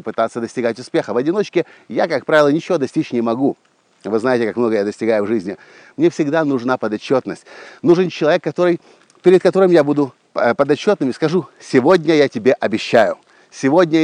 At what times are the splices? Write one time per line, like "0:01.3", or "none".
none